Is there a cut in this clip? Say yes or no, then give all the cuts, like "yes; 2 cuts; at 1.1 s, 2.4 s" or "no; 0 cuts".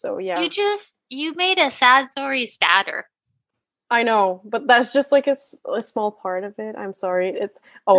no; 0 cuts